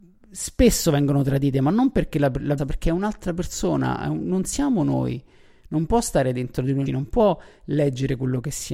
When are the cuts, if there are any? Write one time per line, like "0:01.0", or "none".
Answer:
0:02.6
0:06.9